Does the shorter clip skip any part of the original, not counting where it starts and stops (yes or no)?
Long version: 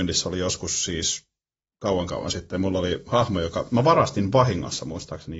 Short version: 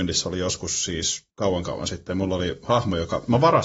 yes